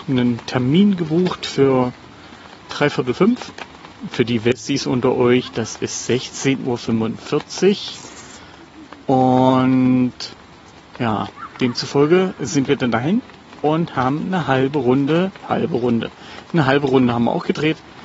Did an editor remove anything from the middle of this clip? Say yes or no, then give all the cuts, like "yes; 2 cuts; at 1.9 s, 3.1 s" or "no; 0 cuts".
yes; 1 cut; at 15.4 s